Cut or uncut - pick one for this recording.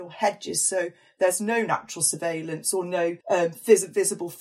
cut